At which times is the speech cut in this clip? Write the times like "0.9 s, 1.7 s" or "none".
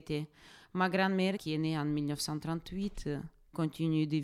1.4 s